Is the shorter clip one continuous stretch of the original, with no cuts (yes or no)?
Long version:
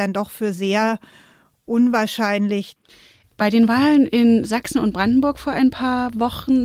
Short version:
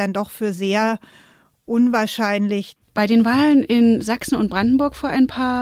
no